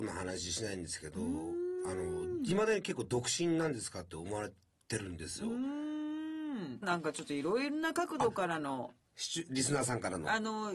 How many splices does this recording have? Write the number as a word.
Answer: one